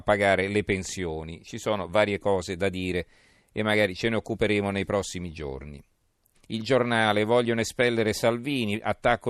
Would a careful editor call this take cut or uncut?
cut